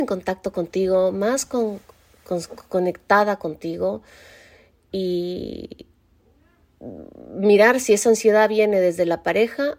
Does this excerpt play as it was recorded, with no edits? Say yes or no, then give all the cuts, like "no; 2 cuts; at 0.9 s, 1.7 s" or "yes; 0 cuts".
yes; 0 cuts